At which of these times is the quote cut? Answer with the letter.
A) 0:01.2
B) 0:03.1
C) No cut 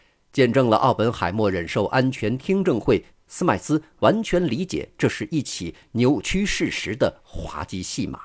B